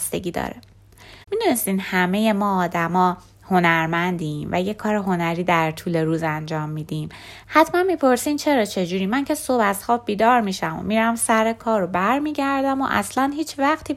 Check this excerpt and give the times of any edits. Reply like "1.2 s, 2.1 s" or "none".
1.2 s, 7.4 s